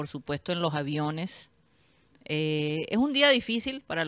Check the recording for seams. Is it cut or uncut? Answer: uncut